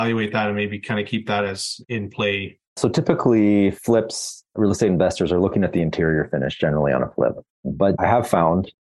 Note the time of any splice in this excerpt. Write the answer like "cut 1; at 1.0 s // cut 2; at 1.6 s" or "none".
cut 1; at 2.8 s

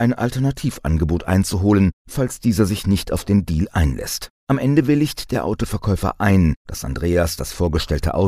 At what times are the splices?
cut 1; at 4.4 s

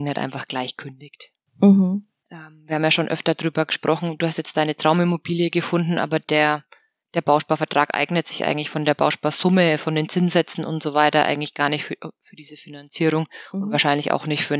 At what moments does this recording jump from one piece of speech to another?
cut 1; at 2.2 s

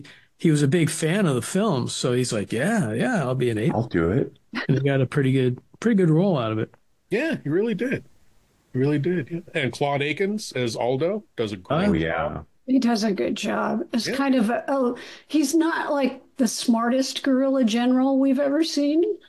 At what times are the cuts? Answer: none

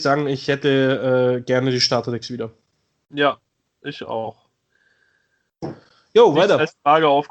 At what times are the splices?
none

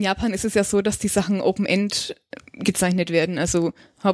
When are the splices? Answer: none

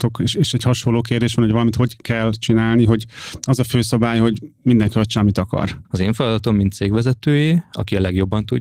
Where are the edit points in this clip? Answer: cut 1; at 5.8 s

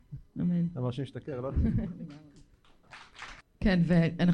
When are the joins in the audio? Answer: cut 1; at 3.4 s

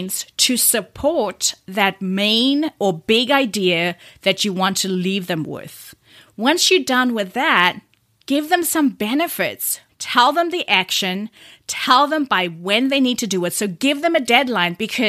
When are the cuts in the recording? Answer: cut 1; at 9.9 s

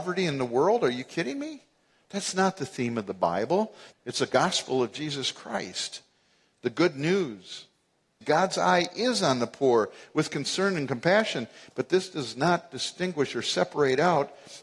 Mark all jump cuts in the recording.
cut 1; at 3.9 s // cut 2; at 8.2 s

